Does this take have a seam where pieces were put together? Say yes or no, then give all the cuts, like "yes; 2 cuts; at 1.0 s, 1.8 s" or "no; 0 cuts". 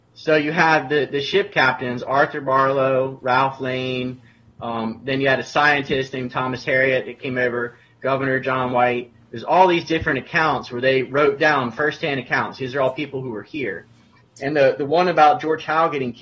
no; 0 cuts